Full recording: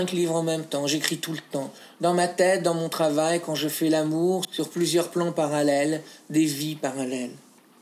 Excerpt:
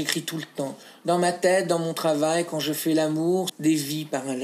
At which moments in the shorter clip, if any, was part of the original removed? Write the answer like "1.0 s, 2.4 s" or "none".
3.5 s

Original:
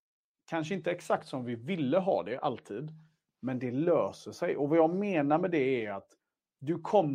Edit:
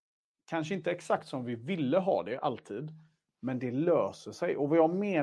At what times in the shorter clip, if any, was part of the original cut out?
none

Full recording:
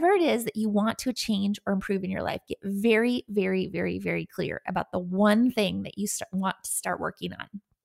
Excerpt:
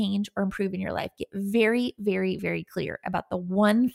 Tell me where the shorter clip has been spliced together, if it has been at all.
2.4 s

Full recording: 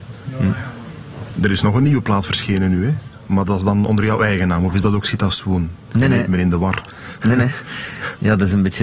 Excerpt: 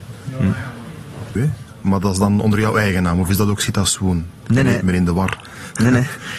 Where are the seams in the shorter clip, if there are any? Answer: 1.4 s

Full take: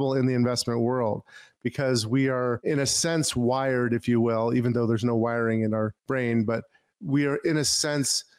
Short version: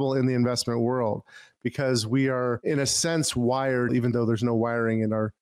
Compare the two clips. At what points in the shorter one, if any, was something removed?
3.9 s

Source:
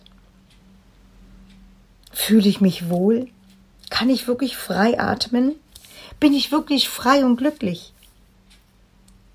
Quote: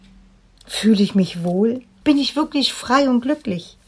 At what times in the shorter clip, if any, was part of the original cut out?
2.0 s

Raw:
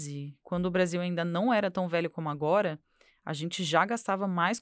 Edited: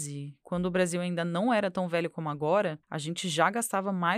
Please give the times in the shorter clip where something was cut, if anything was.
2.8 s

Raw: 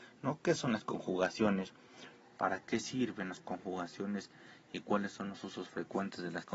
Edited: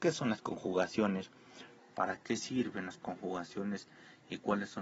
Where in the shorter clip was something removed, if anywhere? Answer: none

